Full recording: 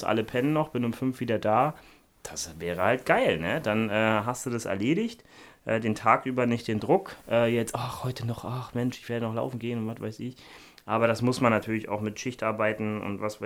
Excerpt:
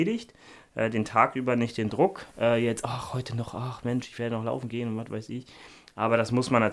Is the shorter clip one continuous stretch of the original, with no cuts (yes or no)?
yes